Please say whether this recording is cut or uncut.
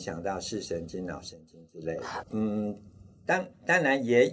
cut